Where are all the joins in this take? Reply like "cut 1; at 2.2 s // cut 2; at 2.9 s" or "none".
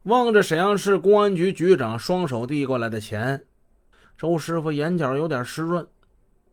none